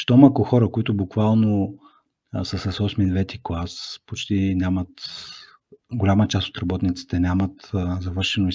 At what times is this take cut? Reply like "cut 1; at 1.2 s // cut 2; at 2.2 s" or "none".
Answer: none